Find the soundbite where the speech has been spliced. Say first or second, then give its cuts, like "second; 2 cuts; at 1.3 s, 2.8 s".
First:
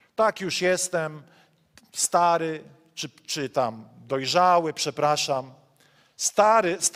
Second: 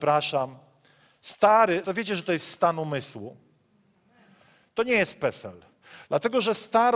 second; 1 cut; at 1.8 s